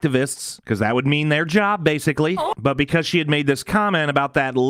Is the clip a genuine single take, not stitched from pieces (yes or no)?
no